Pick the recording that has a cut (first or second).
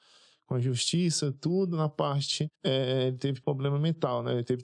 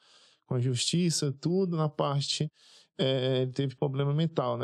first